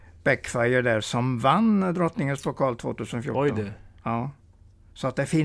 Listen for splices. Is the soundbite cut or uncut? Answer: uncut